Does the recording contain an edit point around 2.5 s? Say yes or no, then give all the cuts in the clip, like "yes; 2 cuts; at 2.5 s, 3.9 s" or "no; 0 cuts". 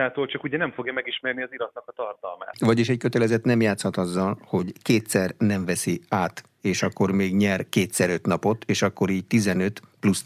yes; 1 cut; at 2.5 s